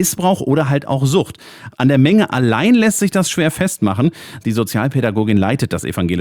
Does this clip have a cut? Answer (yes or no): yes